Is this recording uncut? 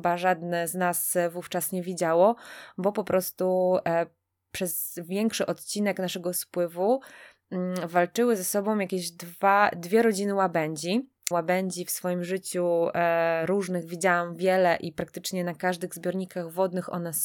no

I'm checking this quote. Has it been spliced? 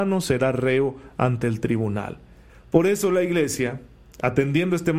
yes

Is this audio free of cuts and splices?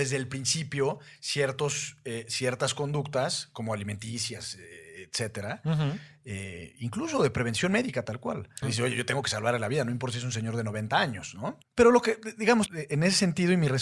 no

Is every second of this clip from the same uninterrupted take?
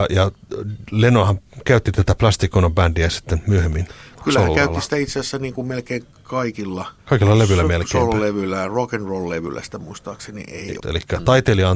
no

